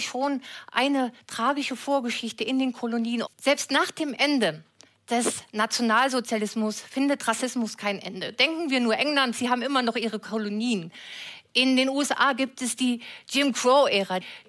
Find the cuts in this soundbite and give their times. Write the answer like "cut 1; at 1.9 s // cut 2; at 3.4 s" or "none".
cut 1; at 3.2 s // cut 2; at 9.3 s